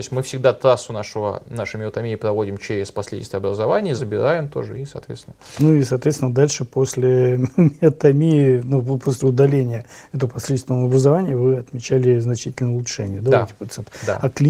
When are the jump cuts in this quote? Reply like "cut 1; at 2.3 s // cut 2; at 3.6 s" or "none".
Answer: cut 1; at 4.0 s